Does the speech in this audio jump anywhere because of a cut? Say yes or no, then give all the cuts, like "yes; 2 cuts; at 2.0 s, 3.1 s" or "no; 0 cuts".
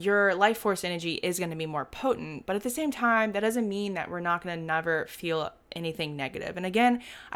no; 0 cuts